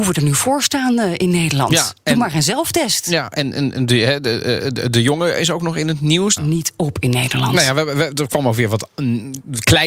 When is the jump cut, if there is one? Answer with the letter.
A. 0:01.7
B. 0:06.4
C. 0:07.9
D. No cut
B